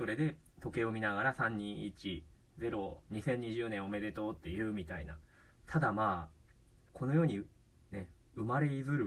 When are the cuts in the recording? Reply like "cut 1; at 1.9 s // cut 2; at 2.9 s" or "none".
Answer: cut 1; at 6.9 s